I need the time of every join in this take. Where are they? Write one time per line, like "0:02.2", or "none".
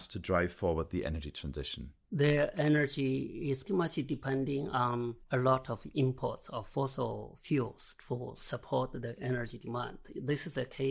0:02.1
0:03.6